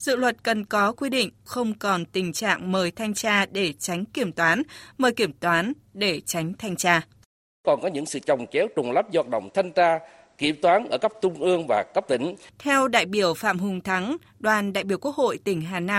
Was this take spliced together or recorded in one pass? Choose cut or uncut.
cut